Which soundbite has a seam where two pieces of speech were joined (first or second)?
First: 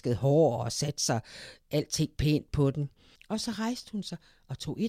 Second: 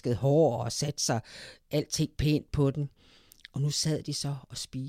first